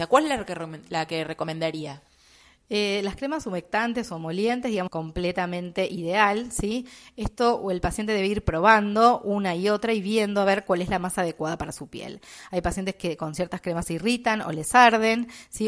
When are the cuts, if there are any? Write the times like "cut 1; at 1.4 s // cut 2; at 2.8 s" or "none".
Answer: cut 1; at 4.9 s